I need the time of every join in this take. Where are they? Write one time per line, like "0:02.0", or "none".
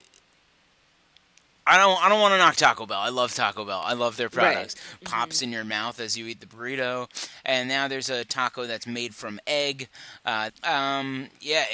0:05.0
0:10.5